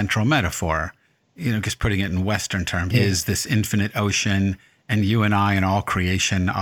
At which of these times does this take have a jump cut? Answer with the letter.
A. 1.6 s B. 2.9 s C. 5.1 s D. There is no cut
B